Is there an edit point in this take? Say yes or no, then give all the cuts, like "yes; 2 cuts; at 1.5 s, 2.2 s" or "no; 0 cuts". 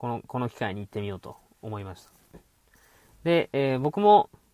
no; 0 cuts